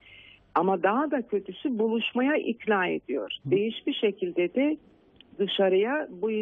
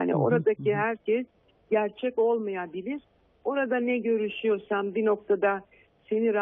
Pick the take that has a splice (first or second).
first